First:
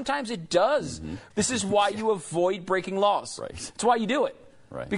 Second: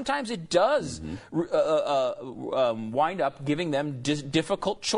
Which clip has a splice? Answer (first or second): first